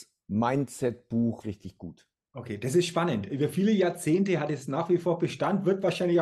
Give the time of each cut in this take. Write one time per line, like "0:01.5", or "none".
0:01.4